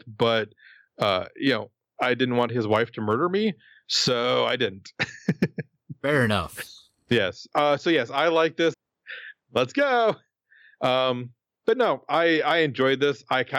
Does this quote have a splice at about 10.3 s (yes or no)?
no